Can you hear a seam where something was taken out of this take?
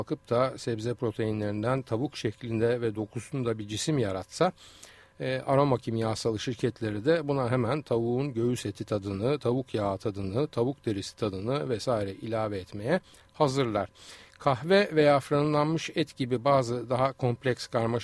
no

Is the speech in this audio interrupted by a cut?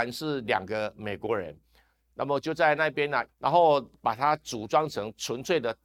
yes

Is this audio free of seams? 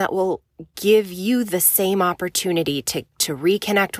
yes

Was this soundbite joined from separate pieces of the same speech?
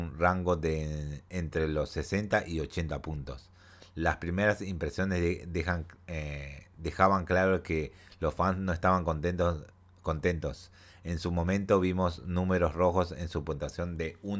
no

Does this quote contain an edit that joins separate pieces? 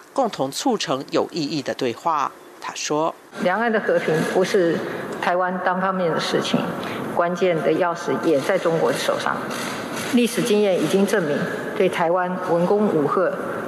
no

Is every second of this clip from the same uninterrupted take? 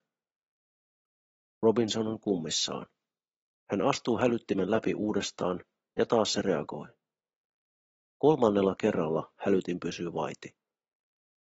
yes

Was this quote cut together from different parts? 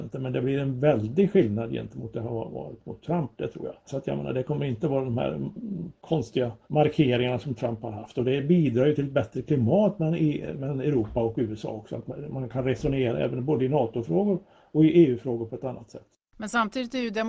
yes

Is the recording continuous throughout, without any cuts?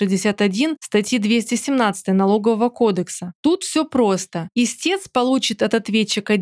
no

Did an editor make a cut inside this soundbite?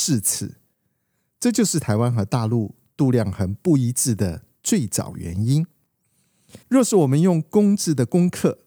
yes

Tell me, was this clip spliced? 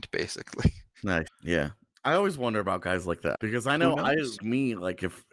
yes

